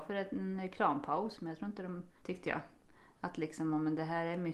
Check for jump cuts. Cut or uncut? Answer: cut